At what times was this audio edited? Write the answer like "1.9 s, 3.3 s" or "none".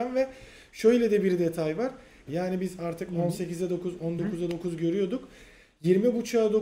2.3 s